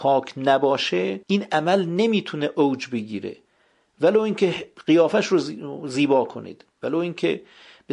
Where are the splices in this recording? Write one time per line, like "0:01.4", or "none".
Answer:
0:01.2